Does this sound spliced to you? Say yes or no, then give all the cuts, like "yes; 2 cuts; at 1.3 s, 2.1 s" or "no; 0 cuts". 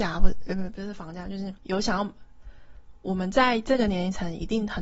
yes; 1 cut; at 1.6 s